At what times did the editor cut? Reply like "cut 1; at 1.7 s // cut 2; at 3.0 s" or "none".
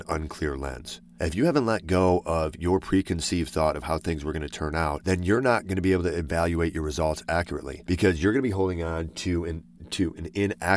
cut 1; at 1.0 s